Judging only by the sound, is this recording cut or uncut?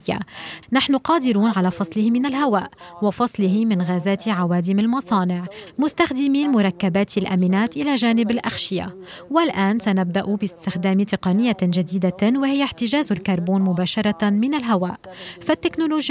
uncut